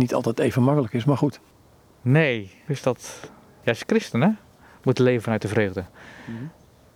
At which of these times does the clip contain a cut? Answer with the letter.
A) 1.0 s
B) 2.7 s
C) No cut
B